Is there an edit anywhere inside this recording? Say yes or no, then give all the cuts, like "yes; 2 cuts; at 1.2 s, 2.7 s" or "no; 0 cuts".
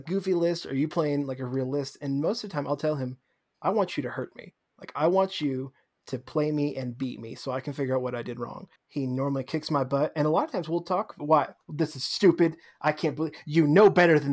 yes; 2 cuts; at 8.8 s, 11.2 s